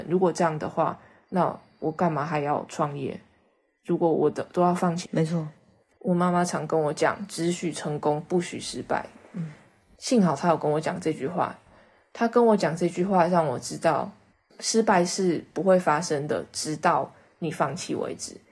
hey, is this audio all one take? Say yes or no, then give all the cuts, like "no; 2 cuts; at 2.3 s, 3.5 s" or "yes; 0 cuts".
no; 1 cut; at 5.0 s